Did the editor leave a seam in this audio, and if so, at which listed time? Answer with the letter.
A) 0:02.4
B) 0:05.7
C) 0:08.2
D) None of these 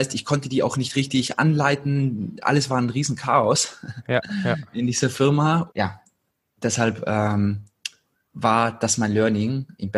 B